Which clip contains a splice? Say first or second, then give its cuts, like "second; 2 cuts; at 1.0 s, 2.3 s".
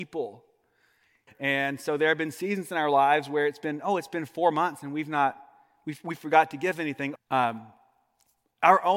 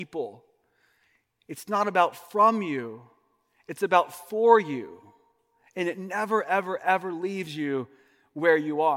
first; 2 cuts; at 1.3 s, 7.2 s